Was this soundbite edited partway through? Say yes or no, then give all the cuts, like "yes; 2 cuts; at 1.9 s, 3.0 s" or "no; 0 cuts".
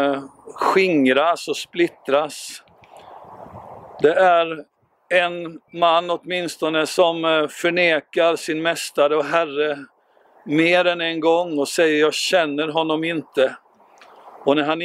no; 0 cuts